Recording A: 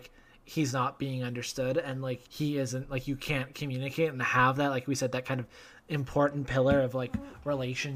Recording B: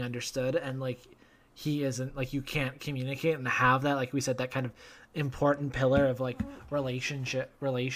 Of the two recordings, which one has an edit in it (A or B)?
A